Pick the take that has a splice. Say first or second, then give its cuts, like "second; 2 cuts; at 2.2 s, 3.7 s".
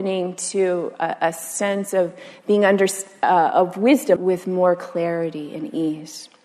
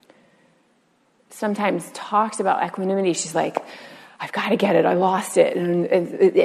first; 1 cut; at 4.2 s